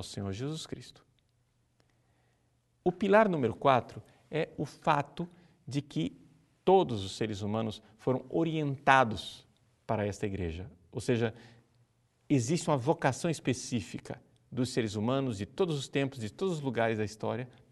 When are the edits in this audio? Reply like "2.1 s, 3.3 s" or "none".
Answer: none